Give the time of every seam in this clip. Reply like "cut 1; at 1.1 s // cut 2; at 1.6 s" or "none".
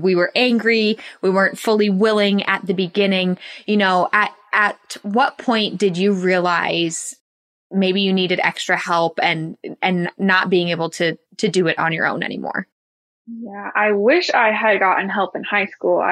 cut 1; at 11.2 s